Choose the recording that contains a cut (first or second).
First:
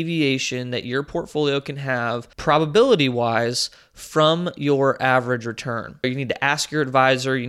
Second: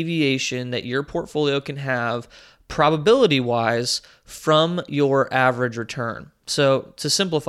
first